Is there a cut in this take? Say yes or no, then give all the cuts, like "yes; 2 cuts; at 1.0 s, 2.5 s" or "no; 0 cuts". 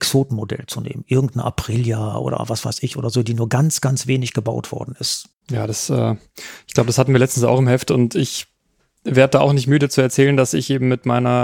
yes; 1 cut; at 5.3 s